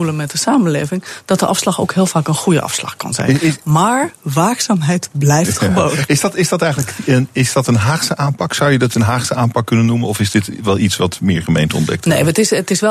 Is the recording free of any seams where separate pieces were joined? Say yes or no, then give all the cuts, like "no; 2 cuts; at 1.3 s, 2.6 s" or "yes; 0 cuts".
yes; 0 cuts